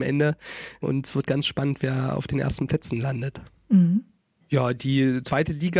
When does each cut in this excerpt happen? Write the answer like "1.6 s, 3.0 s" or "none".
none